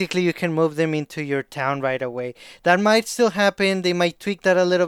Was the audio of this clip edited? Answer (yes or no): no